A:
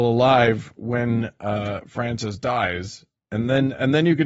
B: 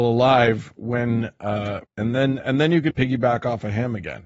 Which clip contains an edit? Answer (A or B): B